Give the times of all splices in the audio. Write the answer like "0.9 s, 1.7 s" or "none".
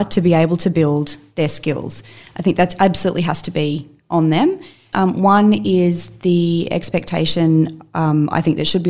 4.9 s